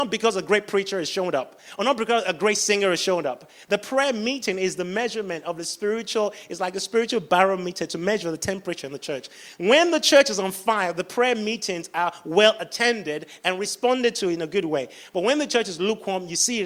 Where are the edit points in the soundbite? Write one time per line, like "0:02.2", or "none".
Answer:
none

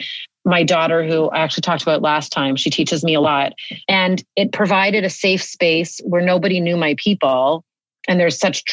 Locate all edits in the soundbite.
0:03.8

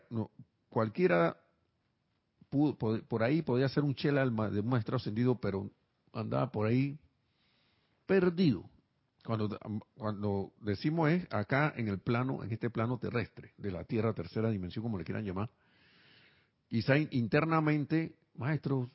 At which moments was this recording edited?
none

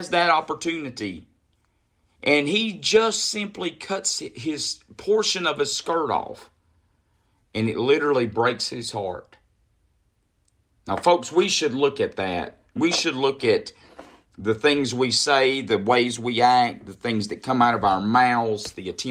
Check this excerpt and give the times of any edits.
none

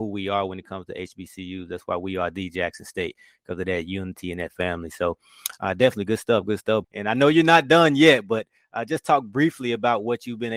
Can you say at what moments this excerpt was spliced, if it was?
0:06.8

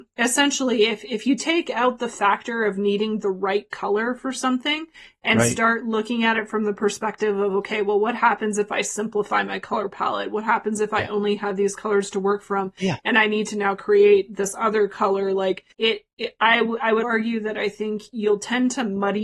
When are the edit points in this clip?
0:15.7
0:17.0

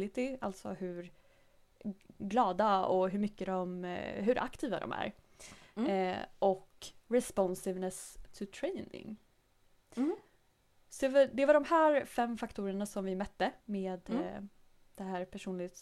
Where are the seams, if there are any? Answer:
0:13.6

